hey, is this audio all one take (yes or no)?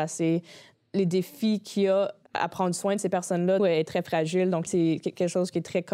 no